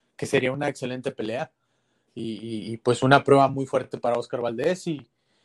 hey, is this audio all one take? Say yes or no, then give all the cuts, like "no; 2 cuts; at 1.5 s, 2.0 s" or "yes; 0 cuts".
yes; 0 cuts